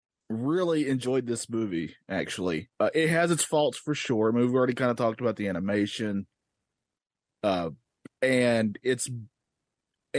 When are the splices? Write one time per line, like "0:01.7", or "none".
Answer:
0:02.7